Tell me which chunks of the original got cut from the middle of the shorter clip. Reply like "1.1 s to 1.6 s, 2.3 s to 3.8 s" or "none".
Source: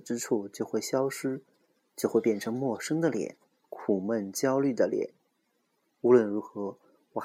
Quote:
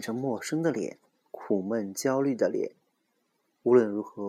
none